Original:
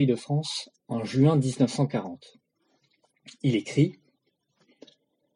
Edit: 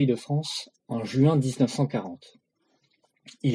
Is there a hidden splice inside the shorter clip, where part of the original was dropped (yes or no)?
no